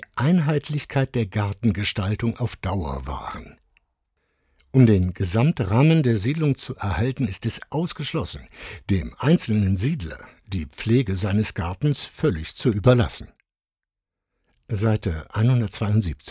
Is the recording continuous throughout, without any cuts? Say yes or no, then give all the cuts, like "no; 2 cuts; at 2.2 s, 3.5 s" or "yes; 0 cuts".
yes; 0 cuts